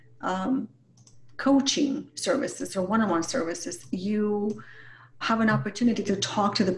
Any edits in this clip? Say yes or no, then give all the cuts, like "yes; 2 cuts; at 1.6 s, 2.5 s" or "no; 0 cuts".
yes; 1 cut; at 5.2 s